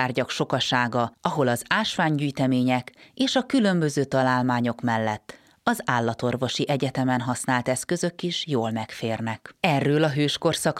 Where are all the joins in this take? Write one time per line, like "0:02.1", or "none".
0:09.6